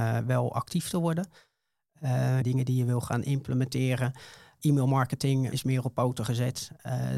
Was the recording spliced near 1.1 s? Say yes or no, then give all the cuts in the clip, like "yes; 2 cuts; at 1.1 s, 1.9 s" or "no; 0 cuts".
no; 2 cuts; at 2.4 s, 5.5 s